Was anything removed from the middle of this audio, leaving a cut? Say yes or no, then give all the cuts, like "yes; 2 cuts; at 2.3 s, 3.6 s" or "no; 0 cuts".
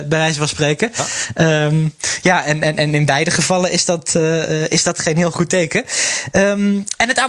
no; 0 cuts